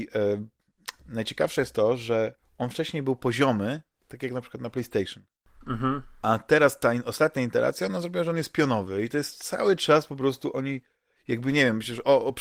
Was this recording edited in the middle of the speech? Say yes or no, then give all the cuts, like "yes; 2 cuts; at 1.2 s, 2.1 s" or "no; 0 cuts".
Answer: no; 0 cuts